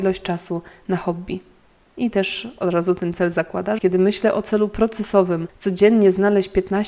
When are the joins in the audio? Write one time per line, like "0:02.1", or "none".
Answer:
0:01.9
0:03.8